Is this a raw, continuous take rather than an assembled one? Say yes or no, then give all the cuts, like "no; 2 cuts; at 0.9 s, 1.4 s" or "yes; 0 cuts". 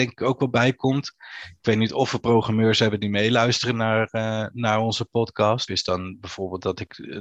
no; 1 cut; at 5.7 s